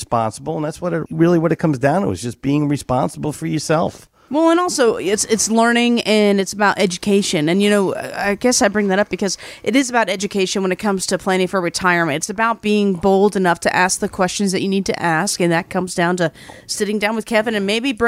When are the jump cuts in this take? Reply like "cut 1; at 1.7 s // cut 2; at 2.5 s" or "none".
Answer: none